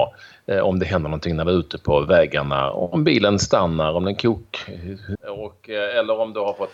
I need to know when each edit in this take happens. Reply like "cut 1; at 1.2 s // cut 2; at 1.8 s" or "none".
cut 1; at 5.2 s